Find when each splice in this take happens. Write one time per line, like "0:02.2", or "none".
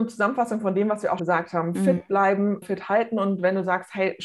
0:01.2
0:02.6